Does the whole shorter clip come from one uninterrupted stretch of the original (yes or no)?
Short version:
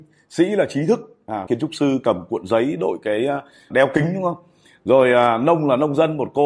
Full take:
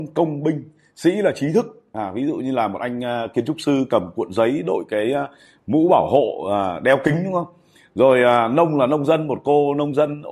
no